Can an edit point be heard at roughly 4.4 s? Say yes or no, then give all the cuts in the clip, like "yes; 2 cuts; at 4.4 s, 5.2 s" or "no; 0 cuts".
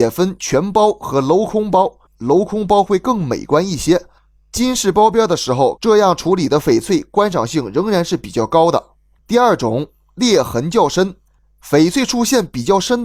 no; 3 cuts; at 2.1 s, 5.8 s, 9.2 s